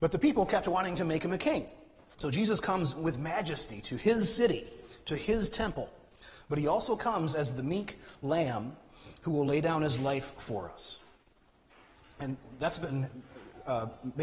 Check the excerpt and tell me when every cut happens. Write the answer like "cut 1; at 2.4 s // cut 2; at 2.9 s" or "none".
cut 1; at 2.1 s